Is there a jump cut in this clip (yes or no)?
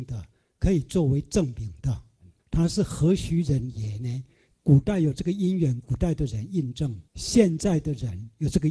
yes